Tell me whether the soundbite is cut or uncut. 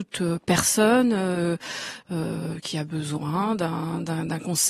uncut